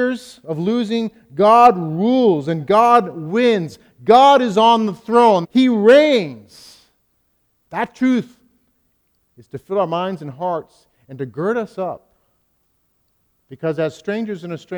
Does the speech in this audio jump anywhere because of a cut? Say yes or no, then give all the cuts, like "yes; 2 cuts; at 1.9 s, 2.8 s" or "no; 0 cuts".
yes; 1 cut; at 5.4 s